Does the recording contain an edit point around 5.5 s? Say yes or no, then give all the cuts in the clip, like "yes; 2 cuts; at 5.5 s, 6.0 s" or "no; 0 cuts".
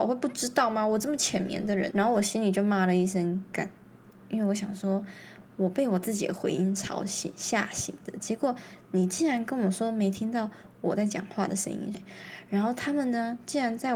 no; 2 cuts; at 1.9 s, 11.9 s